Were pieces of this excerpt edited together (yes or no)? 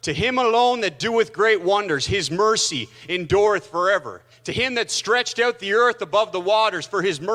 yes